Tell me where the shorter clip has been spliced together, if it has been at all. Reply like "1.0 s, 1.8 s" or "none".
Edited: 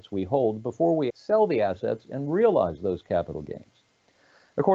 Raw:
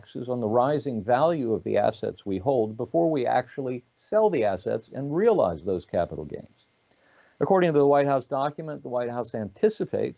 1.1 s